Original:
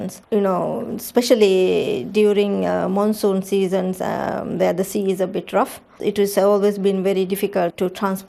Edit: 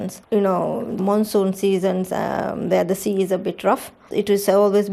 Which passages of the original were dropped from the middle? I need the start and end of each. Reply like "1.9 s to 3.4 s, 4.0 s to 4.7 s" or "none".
1.0 s to 2.9 s